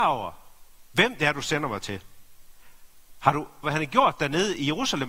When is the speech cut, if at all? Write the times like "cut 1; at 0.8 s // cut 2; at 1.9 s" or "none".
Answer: cut 1; at 3.6 s